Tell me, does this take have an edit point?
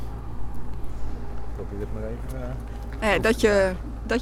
no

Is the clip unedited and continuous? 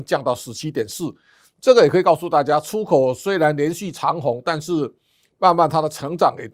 yes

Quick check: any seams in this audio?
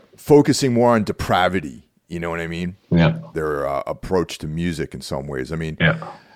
yes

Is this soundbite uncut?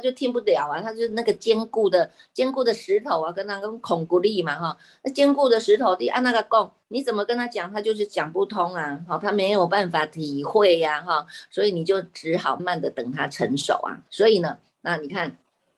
no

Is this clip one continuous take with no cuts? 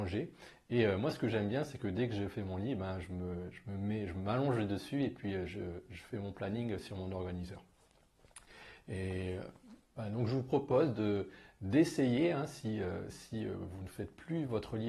yes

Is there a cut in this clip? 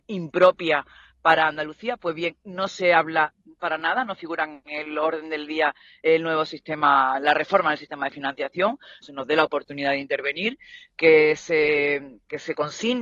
yes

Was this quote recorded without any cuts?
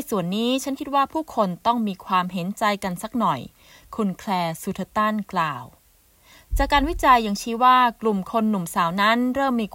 yes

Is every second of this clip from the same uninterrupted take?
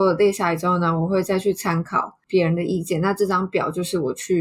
yes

